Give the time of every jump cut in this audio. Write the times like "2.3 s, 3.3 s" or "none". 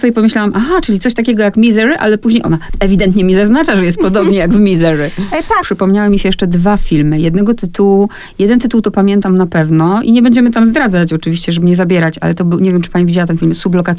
5.6 s